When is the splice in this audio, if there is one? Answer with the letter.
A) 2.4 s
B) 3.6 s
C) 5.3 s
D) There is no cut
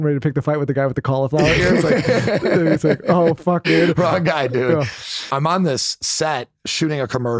B